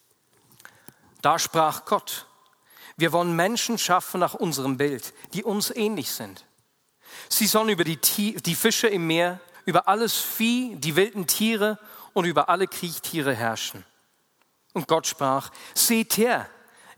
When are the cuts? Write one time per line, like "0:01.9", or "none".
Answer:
0:09.5